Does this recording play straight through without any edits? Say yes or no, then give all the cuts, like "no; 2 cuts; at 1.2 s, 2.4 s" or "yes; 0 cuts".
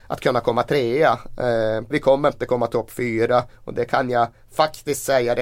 no; 1 cut; at 1.9 s